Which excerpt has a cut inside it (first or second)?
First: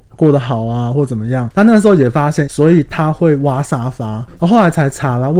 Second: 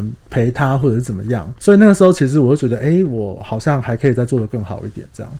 first